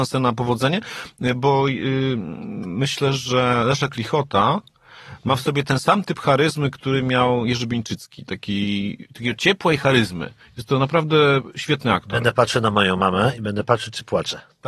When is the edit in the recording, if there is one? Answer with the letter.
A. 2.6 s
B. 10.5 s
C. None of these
C